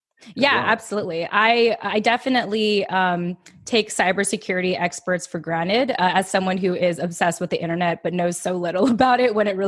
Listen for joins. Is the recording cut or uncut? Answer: uncut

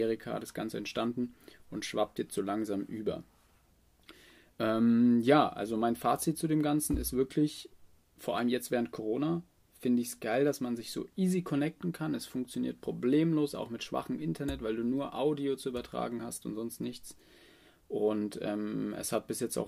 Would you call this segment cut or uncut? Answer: uncut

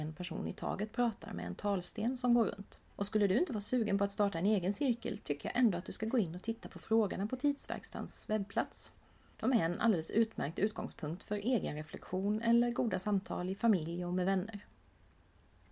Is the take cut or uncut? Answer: cut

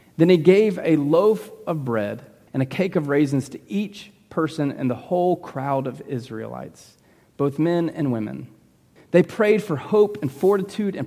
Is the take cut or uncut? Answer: cut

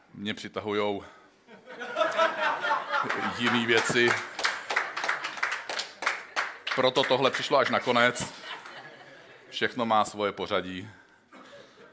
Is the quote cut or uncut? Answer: uncut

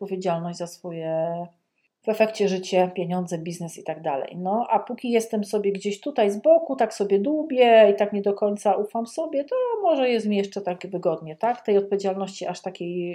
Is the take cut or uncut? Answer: uncut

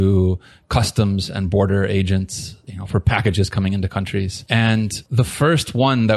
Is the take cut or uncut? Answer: uncut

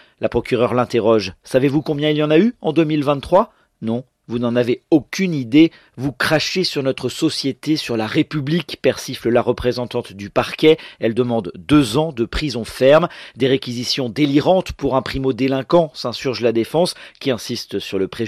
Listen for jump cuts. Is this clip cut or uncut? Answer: uncut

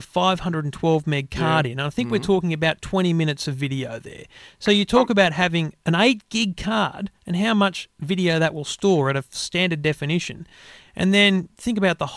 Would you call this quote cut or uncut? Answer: uncut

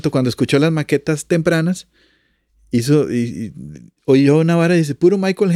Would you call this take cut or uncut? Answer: cut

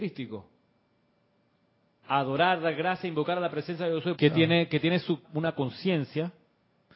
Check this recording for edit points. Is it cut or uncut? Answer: cut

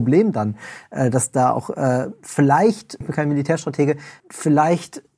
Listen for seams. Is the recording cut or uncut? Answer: cut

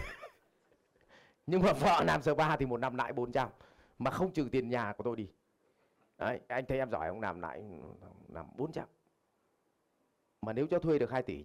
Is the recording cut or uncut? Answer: cut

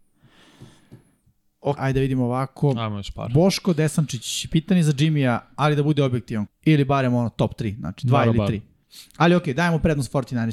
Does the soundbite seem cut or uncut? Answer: cut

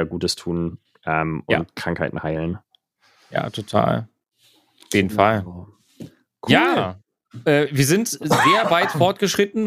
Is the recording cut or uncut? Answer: uncut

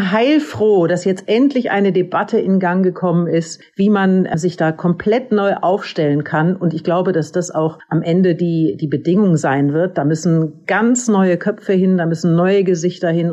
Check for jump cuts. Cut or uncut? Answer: uncut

